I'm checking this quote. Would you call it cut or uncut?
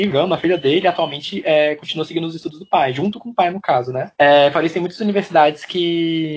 cut